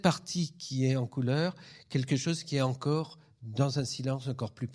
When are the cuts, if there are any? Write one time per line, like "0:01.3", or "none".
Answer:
none

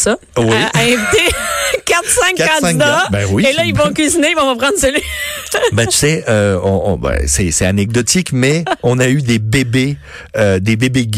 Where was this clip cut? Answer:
none

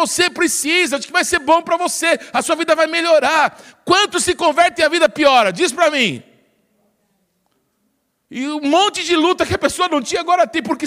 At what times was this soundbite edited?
none

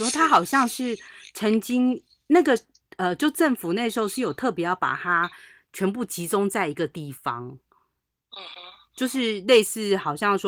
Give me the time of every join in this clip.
none

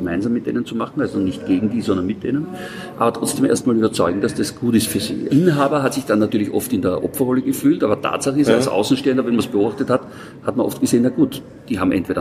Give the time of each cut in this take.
0:05.3

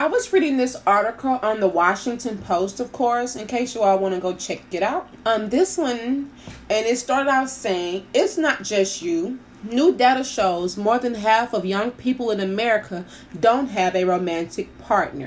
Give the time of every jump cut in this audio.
0:05.2

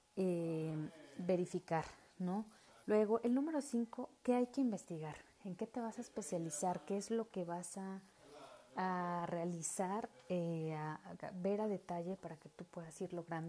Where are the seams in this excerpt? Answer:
0:02.8

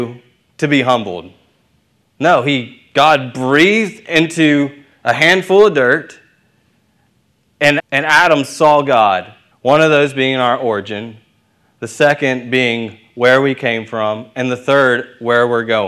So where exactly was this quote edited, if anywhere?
0:02.0
0:07.8
0:09.5

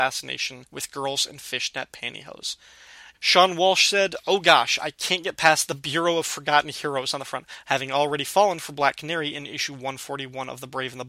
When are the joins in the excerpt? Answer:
0:03.1
0:07.6

